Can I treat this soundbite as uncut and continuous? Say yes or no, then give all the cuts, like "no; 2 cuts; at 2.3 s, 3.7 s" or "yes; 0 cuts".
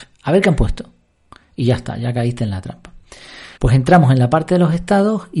no; 1 cut; at 3.6 s